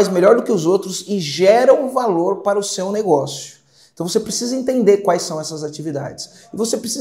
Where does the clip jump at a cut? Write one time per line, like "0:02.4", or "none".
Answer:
none